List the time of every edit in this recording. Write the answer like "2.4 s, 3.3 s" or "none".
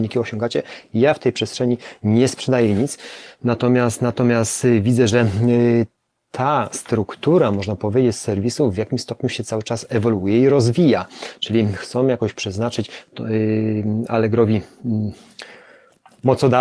none